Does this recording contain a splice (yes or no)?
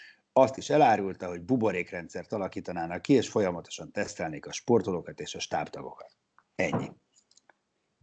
no